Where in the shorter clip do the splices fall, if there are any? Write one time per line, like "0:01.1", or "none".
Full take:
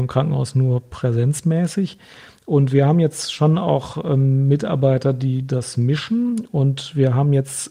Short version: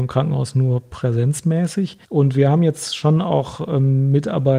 0:02.0

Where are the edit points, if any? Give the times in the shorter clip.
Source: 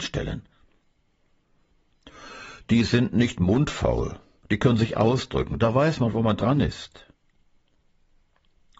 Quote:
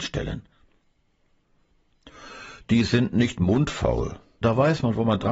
0:04.4

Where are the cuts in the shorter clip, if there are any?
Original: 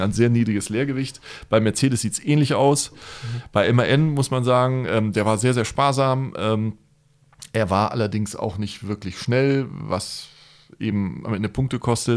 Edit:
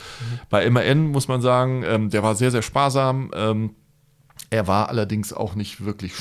none

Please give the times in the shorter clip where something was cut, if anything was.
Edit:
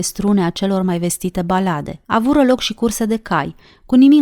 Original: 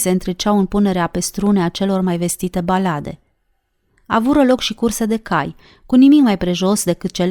0:02.0

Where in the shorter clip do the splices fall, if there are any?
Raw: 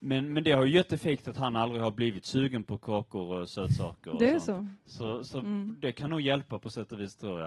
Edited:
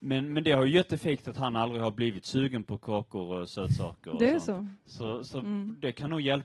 none

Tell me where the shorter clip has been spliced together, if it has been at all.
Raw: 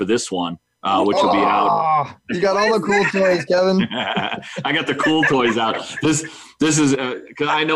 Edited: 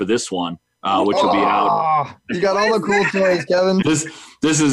0:03.8

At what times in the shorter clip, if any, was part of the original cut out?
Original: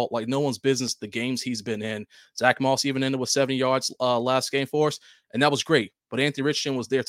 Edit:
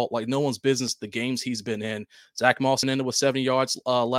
0:02.8

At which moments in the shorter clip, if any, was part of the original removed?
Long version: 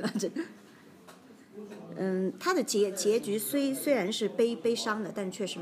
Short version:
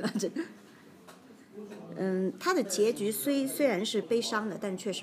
0:02.6
0:04.0

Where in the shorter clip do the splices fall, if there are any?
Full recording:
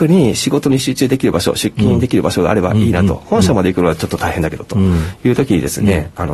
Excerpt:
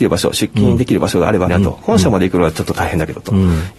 0:01.5

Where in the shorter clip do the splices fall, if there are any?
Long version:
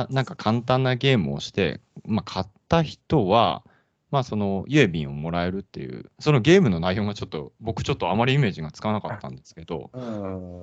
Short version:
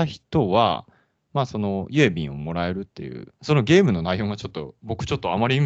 none

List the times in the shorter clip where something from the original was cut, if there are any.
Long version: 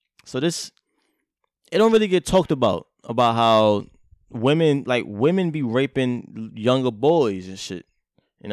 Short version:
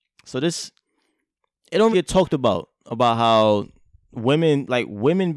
0:01.9

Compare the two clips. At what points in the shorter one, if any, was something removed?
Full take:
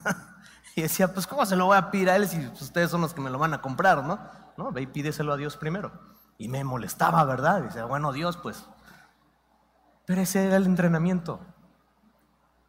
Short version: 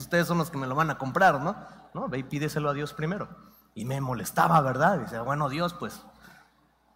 none

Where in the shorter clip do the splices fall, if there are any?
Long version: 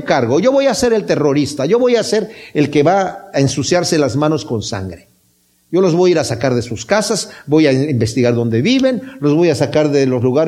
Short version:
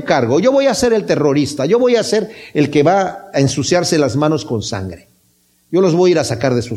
none

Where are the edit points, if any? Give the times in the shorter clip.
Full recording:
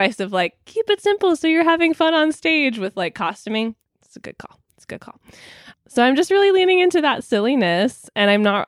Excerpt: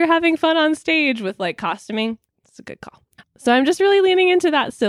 0:03.2

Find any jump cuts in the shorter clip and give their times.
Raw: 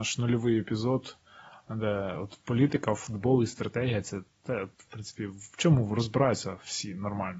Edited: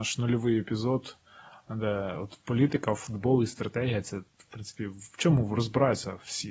0:04.3

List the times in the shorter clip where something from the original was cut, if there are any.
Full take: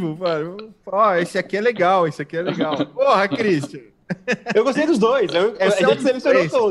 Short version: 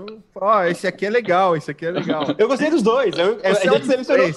0:02.4

